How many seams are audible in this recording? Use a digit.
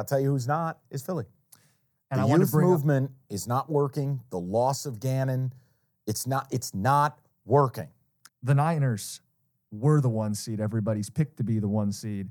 1